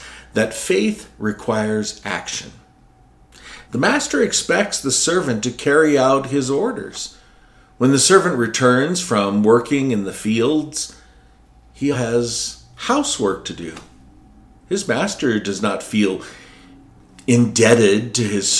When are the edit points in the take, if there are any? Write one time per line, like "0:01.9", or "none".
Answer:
0:03.6
0:11.9